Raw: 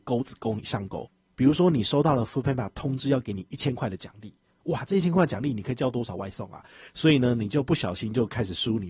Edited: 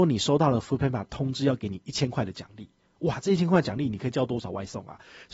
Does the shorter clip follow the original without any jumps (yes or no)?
yes